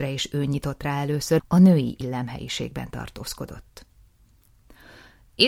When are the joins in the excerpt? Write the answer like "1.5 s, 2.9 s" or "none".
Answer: 1.4 s